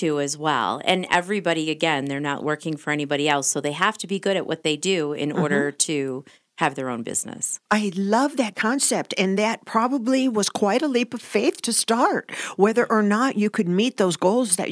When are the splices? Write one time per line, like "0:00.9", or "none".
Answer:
0:07.6